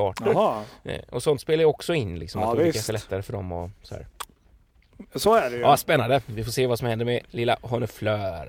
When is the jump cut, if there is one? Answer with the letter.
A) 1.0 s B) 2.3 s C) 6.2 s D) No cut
D